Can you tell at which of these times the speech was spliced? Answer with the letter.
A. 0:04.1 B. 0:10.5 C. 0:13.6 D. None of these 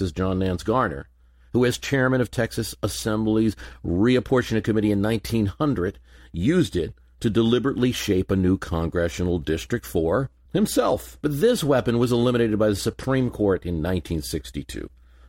B